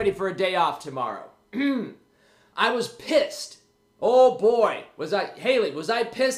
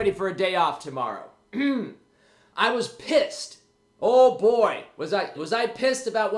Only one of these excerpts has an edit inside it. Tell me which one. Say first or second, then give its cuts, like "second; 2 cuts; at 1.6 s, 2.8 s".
second; 1 cut; at 5.4 s